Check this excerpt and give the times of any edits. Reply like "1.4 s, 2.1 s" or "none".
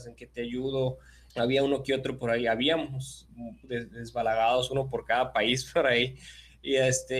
1.3 s